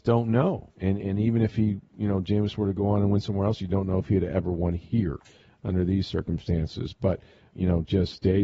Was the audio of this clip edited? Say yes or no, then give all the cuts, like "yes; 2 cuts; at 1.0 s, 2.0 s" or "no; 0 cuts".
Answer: yes; 1 cut; at 7.5 s